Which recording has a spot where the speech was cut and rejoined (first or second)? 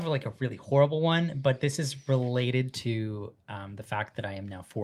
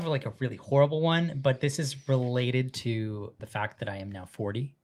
second